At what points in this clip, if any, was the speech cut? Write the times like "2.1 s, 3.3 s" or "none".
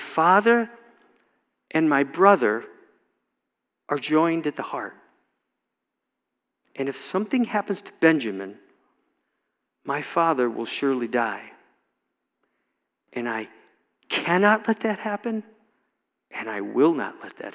none

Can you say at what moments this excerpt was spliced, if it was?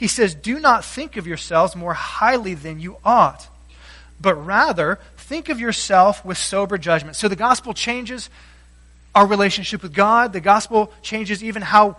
none

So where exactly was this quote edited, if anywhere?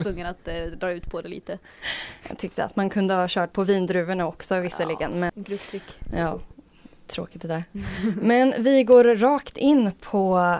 5.3 s

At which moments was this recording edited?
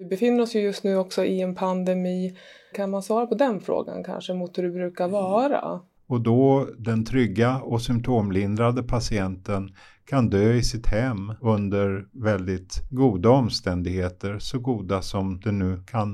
2.7 s, 6.0 s

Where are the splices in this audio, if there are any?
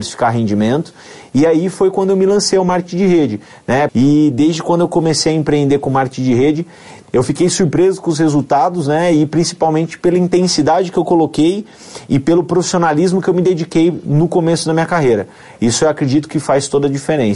3.9 s

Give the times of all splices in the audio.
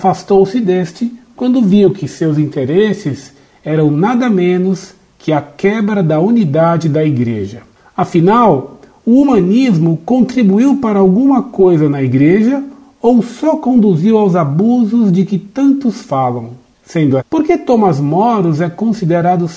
17.2 s

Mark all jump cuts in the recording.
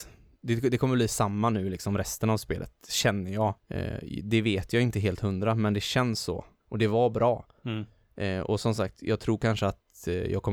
3.6 s, 6.6 s

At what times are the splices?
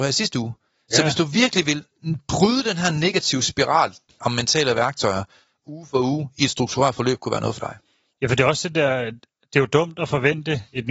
4.2 s

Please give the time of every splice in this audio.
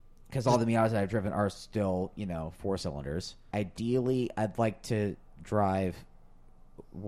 3.5 s

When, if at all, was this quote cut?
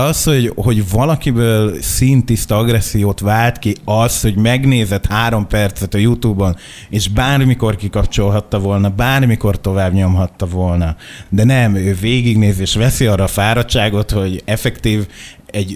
none

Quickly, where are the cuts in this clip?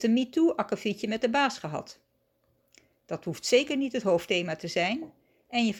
none

